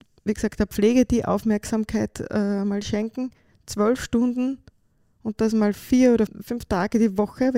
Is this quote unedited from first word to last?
no; 1 cut; at 6.3 s

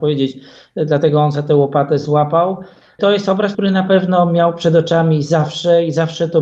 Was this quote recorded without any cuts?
no; 1 cut; at 3.5 s

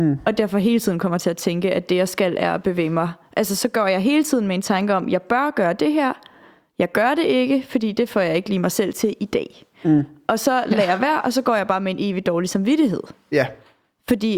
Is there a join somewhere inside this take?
no; 0 cuts

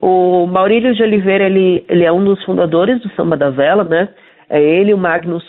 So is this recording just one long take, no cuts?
yes; 0 cuts

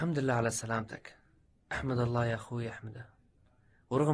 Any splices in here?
no; 0 cuts

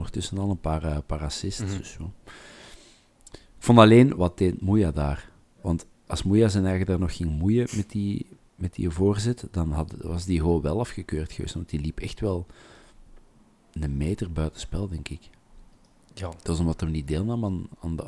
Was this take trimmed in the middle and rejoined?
yes; 1 cut; at 4.2 s

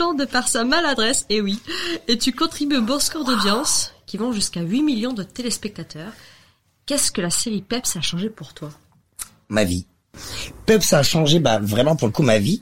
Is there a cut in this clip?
no; 0 cuts

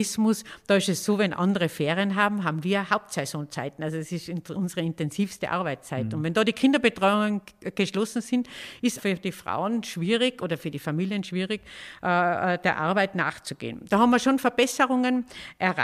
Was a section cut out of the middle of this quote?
yes; 1 cut; at 9.0 s

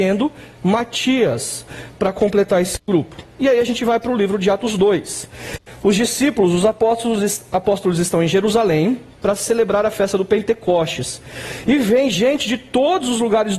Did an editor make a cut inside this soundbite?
no; 0 cuts

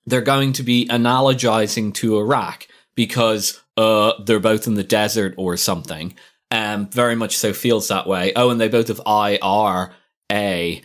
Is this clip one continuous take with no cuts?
yes; 0 cuts

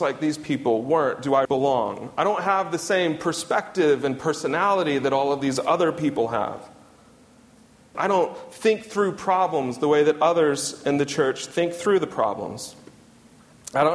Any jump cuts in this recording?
yes; 2 cuts; at 1.5 s, 7.9 s

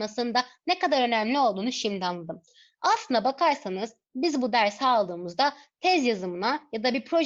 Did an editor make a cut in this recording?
no; 0 cuts

